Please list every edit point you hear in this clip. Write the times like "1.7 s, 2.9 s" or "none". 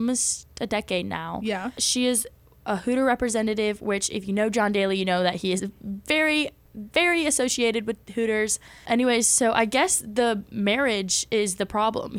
none